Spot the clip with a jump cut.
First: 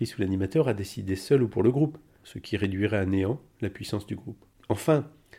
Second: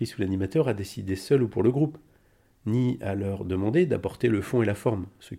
first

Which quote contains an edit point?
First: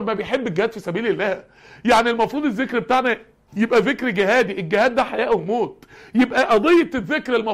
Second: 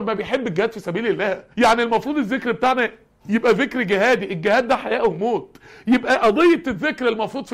second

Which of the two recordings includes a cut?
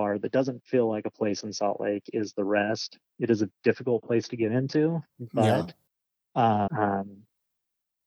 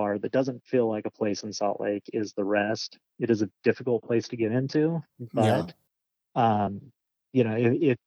first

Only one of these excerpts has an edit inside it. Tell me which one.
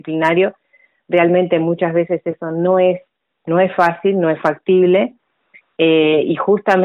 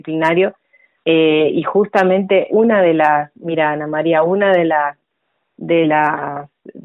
second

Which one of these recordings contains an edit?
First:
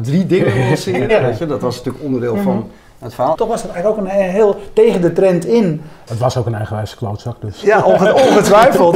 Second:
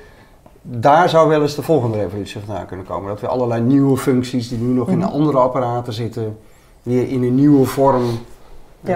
first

